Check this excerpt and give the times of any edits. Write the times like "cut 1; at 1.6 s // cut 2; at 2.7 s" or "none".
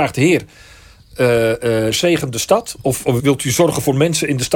cut 1; at 1.9 s // cut 2; at 3.2 s